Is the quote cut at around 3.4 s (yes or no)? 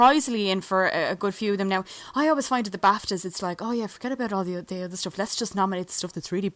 yes